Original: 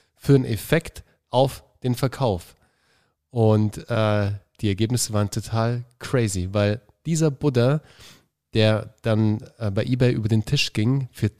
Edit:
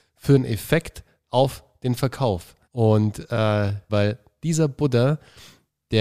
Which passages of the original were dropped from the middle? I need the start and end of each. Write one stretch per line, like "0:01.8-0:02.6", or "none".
0:02.6-0:03.2
0:04.5-0:06.5